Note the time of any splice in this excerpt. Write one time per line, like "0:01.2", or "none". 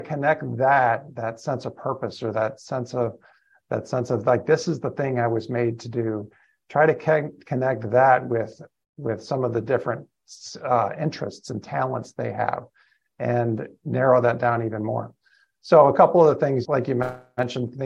0:16.6